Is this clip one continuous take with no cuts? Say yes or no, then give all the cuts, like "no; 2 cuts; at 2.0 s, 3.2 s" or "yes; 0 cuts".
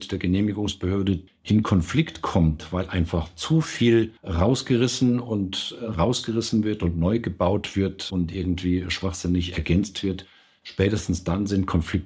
no; 2 cuts; at 1.3 s, 4.2 s